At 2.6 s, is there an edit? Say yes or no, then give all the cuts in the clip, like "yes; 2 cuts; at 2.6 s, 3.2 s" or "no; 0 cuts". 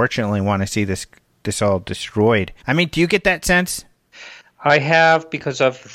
yes; 1 cut; at 2.6 s